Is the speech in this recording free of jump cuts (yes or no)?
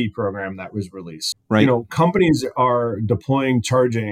no